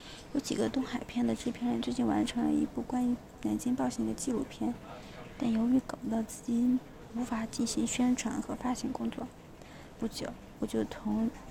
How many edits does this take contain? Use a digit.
1